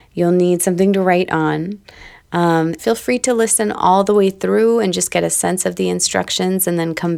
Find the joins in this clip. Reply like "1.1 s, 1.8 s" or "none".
2.8 s